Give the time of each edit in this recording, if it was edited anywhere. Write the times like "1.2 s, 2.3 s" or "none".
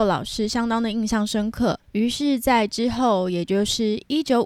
1.8 s